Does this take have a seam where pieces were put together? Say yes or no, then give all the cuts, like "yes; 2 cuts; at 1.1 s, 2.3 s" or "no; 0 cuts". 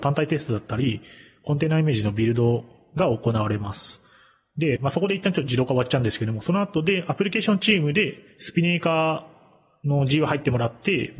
yes; 1 cut; at 4.8 s